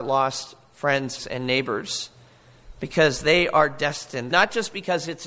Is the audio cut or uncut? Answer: cut